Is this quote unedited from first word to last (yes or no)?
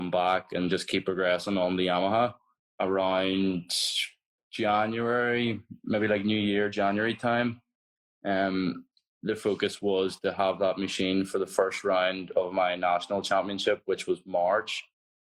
no